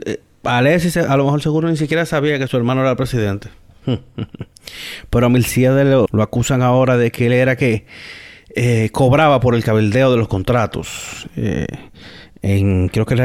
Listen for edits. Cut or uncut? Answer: cut